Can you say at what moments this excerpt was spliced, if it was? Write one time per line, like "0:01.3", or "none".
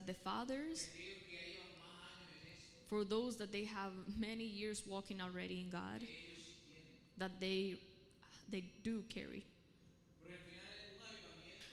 none